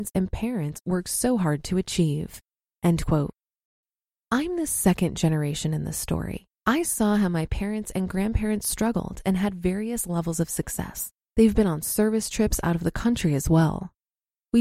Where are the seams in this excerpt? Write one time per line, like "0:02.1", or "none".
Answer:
0:06.6
0:11.2